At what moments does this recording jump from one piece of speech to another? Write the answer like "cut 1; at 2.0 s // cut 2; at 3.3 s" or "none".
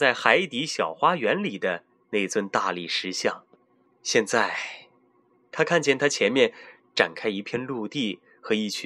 cut 1; at 3.9 s